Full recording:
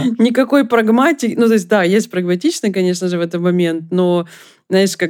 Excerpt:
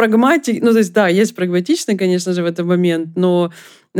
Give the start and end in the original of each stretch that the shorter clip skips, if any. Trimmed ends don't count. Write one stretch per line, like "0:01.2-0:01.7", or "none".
none